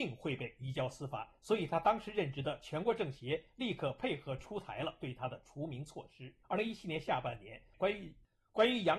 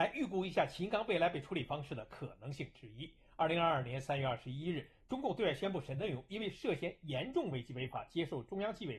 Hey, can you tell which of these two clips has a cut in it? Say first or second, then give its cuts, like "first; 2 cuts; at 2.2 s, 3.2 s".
first; 2 cuts; at 6.4 s, 7.7 s